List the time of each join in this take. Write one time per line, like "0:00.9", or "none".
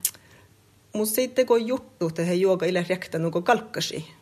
0:02.0